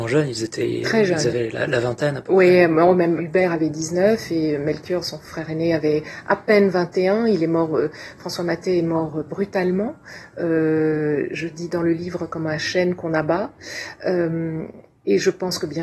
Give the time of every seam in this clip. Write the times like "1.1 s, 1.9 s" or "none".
3.2 s

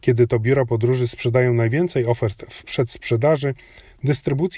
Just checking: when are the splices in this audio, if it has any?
none

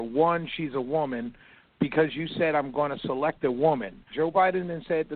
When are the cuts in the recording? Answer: 4.1 s

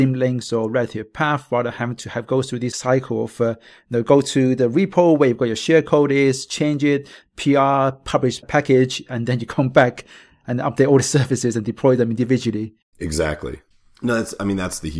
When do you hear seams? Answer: none

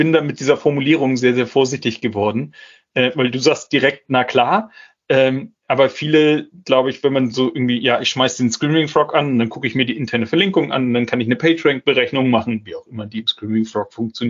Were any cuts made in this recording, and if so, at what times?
none

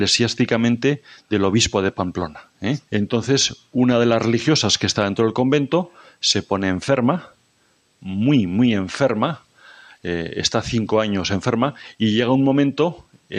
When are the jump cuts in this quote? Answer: 2.9 s

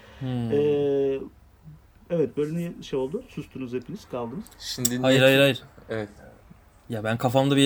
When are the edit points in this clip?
none

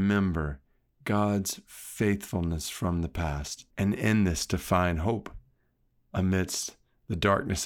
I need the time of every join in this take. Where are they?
3.7 s

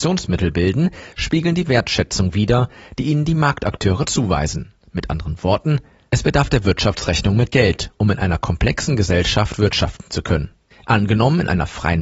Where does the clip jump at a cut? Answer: 10.7 s

